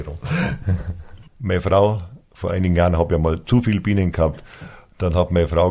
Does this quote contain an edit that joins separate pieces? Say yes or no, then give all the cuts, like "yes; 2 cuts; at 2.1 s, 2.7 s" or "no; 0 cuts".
yes; 1 cut; at 1.3 s